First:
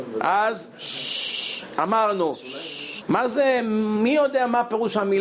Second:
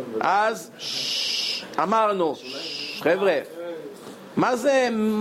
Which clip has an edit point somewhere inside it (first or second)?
first